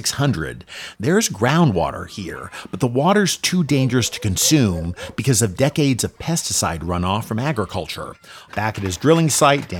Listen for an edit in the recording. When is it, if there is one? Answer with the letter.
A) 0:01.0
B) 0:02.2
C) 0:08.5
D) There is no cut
C